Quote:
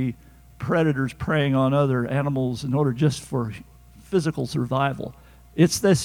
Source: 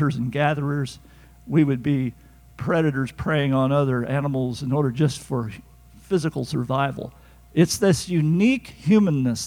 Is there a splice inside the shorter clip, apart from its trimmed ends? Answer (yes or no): no